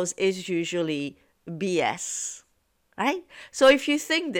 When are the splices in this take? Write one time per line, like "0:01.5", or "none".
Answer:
none